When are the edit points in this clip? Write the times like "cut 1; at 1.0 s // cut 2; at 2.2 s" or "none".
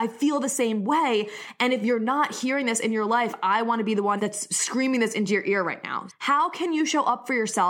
cut 1; at 4.2 s // cut 2; at 6.1 s